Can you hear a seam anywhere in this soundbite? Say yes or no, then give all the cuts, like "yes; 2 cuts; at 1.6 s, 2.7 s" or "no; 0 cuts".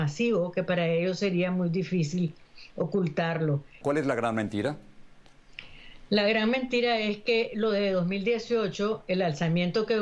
yes; 1 cut; at 3.8 s